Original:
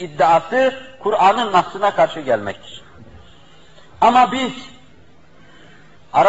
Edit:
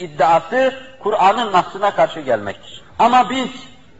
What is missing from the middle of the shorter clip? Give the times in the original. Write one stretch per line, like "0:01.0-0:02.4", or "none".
0:02.9-0:03.9